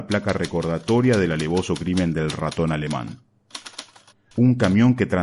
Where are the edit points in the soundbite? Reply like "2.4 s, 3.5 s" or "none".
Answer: 4.3 s